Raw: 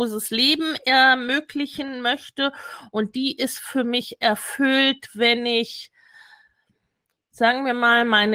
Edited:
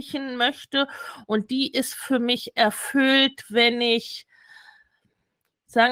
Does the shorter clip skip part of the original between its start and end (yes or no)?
no